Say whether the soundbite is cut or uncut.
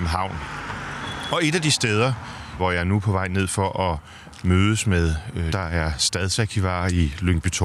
cut